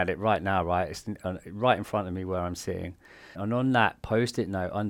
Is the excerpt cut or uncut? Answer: cut